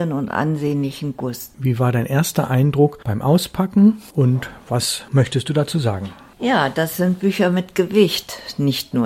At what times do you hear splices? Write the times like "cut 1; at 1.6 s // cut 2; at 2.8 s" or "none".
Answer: cut 1; at 1.5 s